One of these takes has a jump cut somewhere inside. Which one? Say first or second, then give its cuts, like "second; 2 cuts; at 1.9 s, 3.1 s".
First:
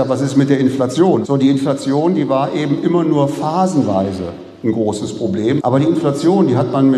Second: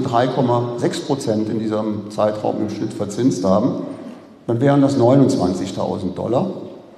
first; 2 cuts; at 1.2 s, 5.6 s